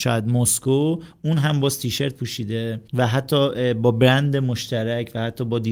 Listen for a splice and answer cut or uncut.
cut